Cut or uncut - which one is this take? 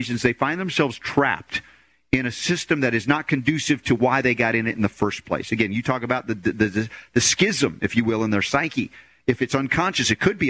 uncut